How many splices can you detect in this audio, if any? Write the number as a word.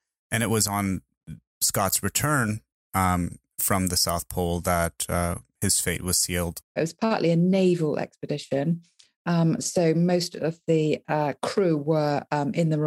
one